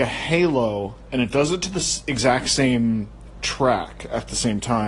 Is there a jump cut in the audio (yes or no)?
yes